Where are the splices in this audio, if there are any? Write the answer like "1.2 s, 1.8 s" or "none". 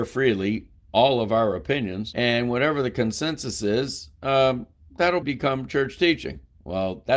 5.2 s